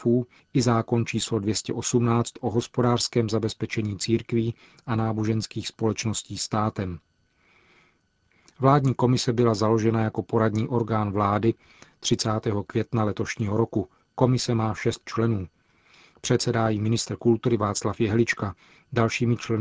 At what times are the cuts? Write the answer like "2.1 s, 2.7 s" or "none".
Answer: none